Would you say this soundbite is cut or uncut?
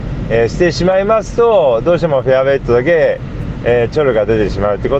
uncut